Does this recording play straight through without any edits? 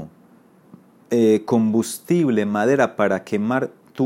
yes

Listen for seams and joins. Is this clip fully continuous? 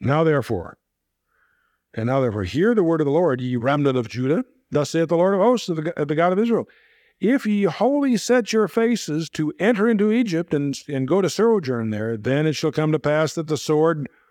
yes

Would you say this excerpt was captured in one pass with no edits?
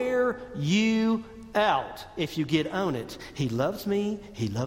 yes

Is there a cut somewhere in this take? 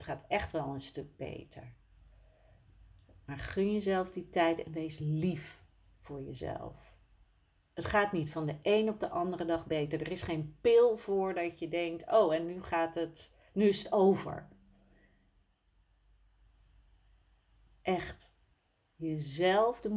no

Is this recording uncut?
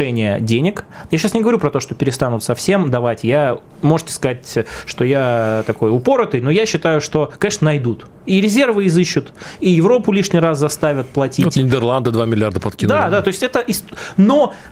no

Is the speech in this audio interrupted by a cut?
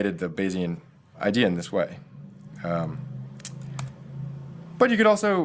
yes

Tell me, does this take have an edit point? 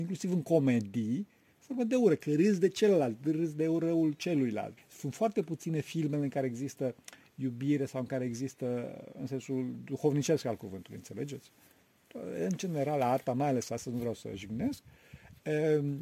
yes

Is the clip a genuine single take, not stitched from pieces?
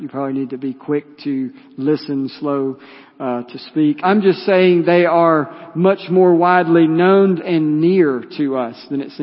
no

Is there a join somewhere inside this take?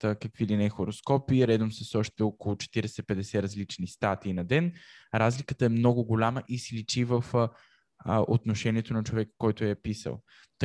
no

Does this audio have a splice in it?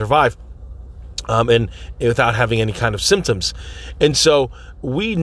no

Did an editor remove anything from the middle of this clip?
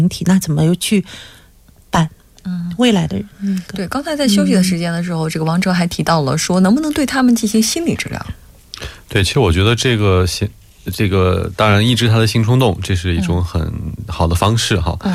no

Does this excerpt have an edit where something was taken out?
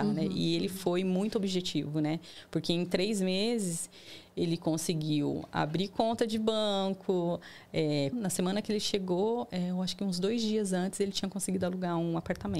yes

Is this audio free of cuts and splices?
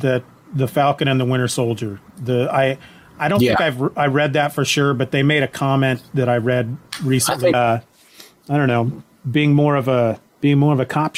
no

